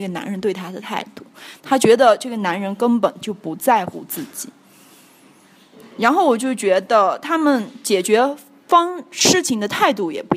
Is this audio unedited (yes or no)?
yes